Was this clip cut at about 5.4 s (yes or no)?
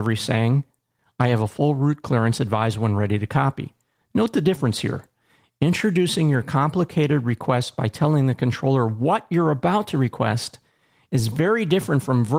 no